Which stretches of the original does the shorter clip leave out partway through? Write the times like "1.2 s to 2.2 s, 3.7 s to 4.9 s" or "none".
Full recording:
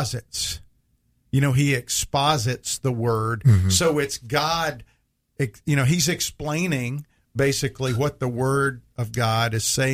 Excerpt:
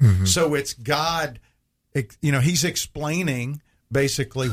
none

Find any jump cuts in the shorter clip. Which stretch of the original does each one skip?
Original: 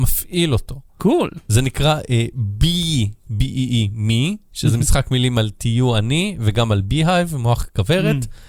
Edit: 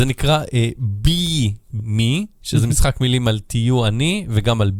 3.4 s to 3.9 s

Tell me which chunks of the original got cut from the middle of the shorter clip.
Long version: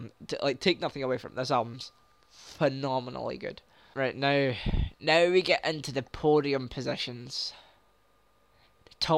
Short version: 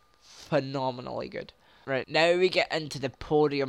4.1 s to 5.0 s

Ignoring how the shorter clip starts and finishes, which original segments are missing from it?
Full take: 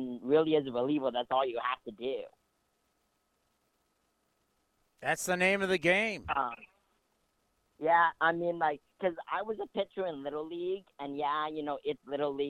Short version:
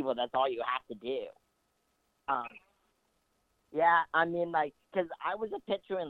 3.2 s to 6.3 s

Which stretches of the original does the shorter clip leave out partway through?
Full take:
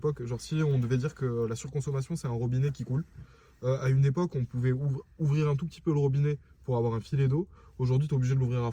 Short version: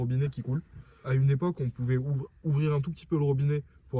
3.5 s to 3.8 s

